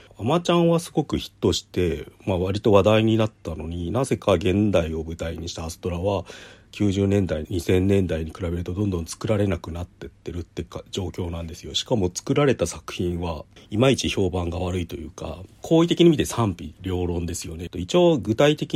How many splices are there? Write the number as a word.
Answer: two